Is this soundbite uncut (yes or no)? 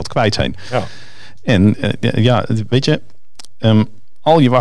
yes